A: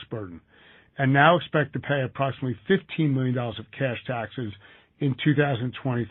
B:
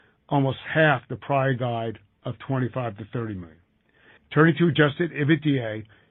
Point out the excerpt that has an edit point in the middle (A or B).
B